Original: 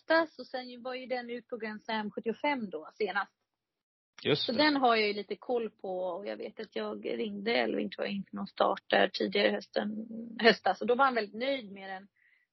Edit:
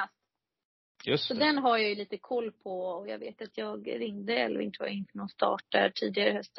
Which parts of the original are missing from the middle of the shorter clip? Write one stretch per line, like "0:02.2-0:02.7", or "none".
none